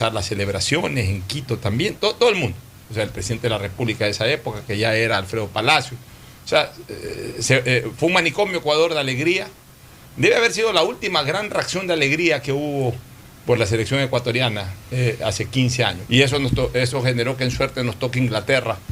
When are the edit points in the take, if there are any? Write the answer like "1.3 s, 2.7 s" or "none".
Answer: 16.1 s